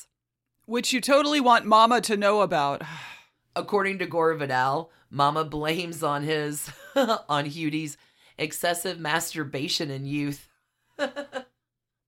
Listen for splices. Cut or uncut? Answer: uncut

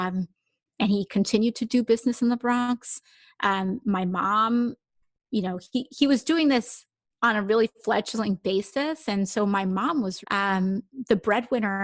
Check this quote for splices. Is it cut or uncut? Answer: cut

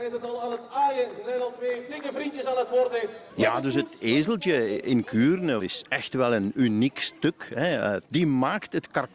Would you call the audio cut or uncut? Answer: cut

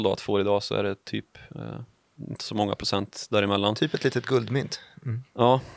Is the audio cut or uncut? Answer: uncut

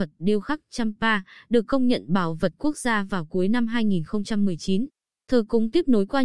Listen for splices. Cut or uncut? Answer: cut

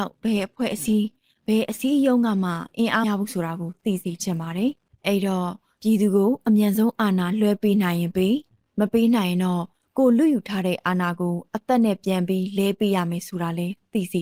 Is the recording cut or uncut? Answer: cut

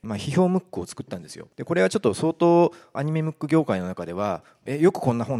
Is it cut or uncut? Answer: cut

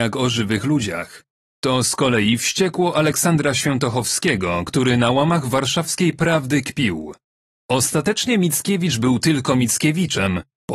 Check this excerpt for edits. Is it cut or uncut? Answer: uncut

